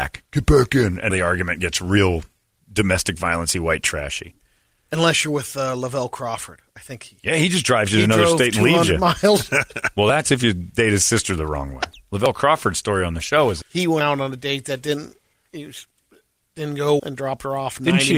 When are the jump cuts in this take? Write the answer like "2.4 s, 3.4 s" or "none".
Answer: 1.1 s, 13.6 s, 17.0 s